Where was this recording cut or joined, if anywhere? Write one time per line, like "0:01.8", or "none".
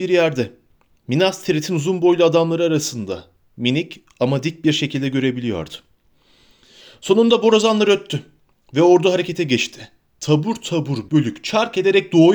0:11.1